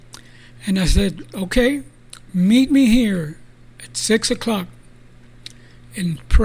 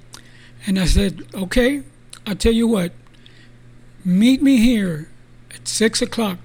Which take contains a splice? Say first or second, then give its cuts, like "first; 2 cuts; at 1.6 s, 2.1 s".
first; 1 cut; at 2.2 s